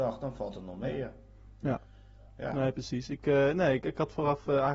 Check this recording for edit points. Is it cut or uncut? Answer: cut